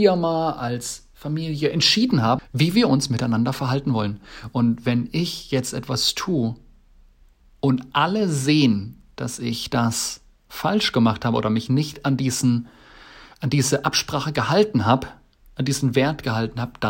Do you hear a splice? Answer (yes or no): yes